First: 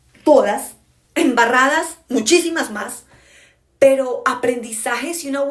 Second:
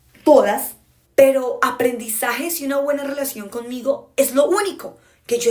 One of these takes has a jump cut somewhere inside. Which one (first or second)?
second